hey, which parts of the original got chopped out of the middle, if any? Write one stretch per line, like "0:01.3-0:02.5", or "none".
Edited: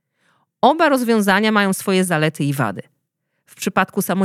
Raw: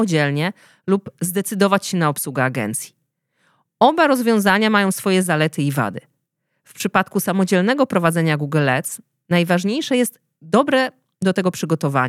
none

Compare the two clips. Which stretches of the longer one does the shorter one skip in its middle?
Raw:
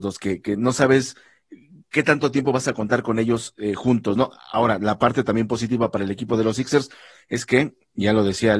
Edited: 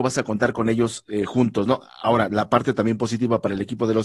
none

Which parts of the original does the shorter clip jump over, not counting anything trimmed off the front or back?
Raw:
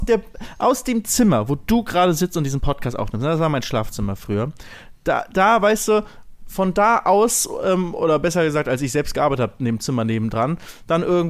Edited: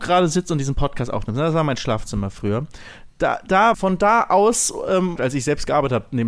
0:05.6-0:06.5
0:07.9-0:08.6

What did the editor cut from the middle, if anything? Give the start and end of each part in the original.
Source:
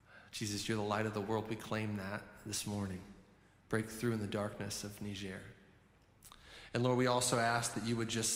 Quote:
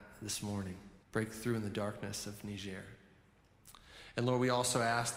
0:03.3-0:03.6

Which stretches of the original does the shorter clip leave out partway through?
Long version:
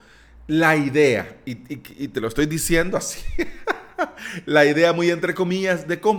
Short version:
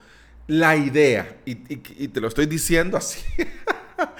none

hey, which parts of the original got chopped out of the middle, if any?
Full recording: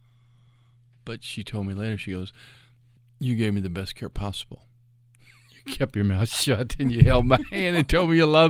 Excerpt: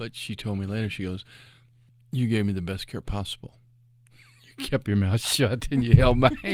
none

